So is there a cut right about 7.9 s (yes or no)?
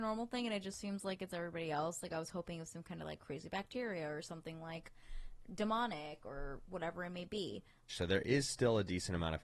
yes